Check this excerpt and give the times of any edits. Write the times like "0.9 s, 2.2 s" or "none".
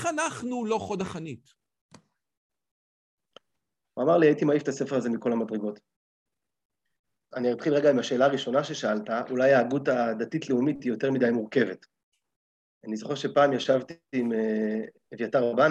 3.8 s, 7.3 s